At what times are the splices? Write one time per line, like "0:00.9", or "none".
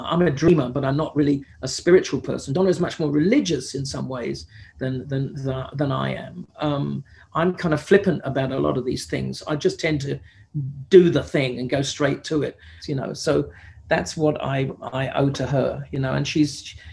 0:12.8